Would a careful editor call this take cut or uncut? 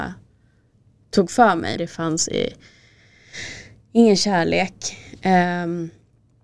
cut